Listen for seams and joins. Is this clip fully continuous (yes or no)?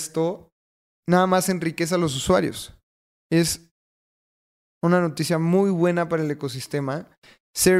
yes